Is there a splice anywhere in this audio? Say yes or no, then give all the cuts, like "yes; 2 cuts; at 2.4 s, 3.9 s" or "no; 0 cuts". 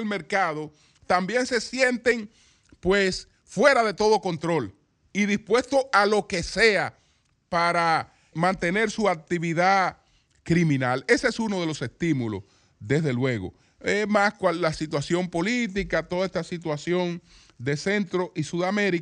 yes; 1 cut; at 8.3 s